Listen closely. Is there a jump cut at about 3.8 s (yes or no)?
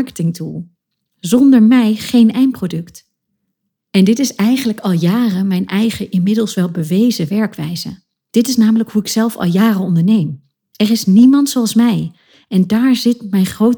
yes